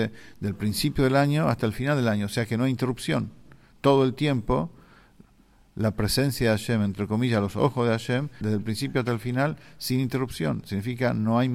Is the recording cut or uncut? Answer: cut